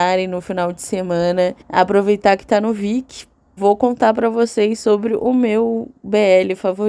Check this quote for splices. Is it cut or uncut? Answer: cut